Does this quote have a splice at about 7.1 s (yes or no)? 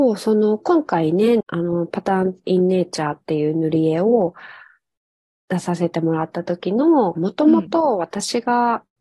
yes